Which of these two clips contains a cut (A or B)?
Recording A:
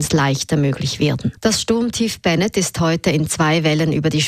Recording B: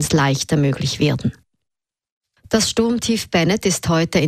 A